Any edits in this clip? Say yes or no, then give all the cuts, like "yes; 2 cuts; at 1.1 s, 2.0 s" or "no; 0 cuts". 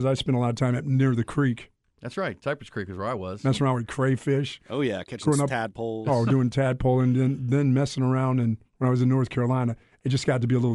yes; 1 cut; at 8.7 s